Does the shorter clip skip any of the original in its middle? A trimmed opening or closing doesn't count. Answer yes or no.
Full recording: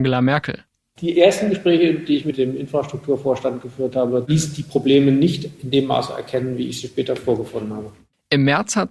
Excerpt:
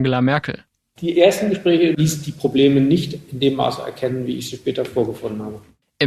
yes